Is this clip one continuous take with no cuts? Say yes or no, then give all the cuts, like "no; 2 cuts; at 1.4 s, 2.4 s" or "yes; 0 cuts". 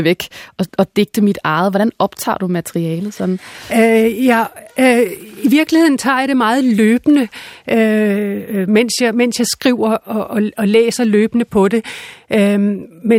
yes; 0 cuts